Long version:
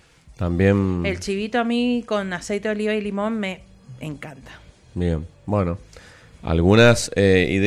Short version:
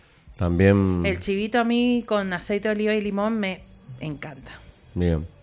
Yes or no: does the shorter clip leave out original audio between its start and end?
no